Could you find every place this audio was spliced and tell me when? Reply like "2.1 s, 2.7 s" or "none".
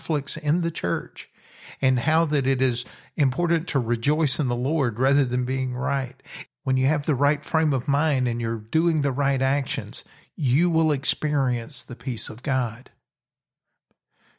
6.5 s